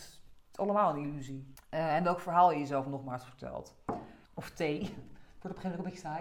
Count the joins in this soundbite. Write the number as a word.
two